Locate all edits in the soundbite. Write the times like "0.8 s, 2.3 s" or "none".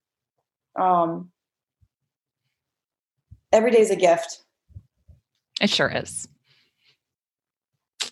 none